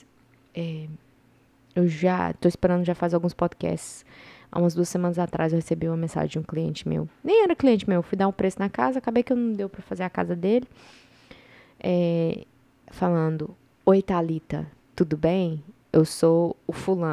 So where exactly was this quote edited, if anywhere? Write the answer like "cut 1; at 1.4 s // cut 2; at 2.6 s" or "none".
none